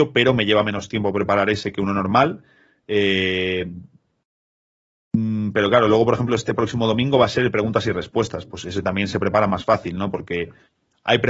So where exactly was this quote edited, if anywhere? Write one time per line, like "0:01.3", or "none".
0:02.8